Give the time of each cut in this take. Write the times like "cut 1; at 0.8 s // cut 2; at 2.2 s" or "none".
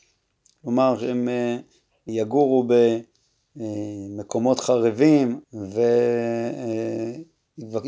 cut 1; at 2.1 s // cut 2; at 5.4 s